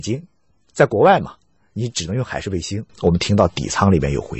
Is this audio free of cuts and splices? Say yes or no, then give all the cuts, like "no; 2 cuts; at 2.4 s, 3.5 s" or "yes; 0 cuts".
no; 1 cut; at 2.9 s